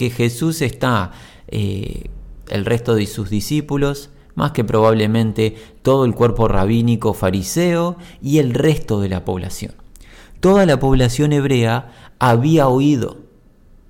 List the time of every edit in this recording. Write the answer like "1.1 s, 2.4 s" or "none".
2.5 s